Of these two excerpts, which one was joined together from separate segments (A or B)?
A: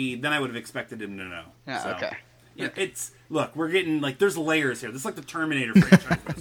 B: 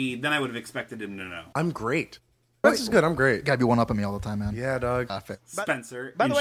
B